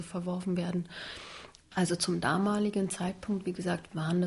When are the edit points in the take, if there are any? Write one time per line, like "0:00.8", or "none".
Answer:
0:01.6